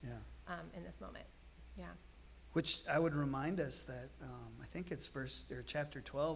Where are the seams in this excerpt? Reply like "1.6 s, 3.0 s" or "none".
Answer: none